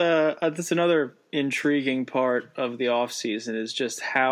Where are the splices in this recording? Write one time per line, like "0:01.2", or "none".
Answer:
none